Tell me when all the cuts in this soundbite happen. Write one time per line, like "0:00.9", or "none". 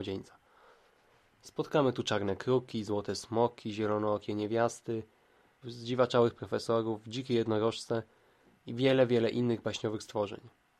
0:05.6